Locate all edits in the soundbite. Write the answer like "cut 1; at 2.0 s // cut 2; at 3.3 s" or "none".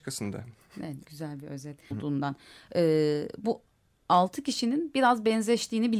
cut 1; at 1.9 s